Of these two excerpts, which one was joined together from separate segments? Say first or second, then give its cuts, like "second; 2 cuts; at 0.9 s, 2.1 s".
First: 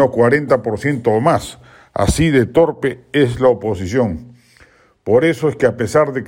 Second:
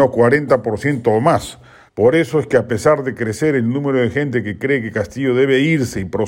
second; 1 cut; at 1.9 s